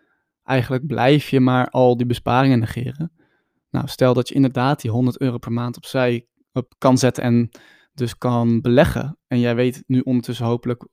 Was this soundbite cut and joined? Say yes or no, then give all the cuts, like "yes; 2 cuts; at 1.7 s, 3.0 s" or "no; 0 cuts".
yes; 1 cut; at 6.7 s